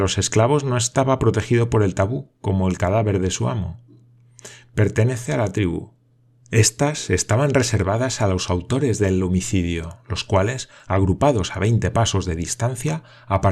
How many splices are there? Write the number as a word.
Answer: one